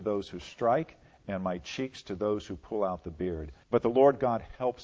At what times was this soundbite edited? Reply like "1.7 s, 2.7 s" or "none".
3.6 s